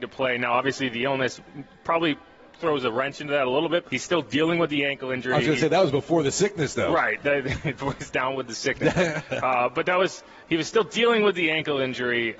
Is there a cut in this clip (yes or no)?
yes